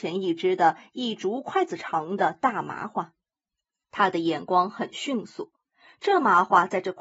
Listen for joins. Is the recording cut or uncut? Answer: uncut